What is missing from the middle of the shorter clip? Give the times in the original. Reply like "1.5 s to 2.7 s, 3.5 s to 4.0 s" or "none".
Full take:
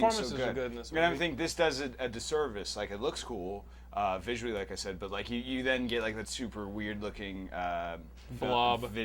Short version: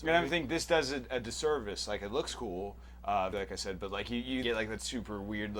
4.2 s to 4.5 s, 5.6 s to 5.9 s

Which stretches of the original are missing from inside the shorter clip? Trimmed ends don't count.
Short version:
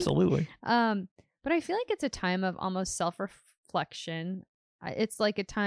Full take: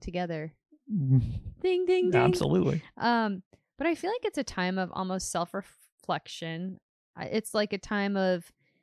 none

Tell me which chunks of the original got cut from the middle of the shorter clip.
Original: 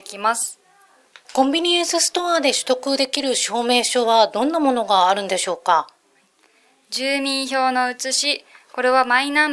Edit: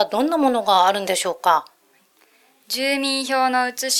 none

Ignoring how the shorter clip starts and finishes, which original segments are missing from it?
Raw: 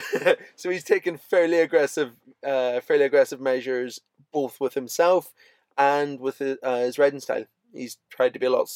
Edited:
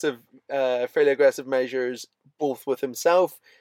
none

